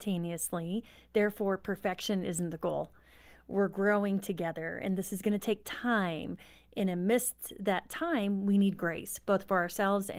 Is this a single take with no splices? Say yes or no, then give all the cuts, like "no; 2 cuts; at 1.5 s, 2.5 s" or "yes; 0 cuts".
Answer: yes; 0 cuts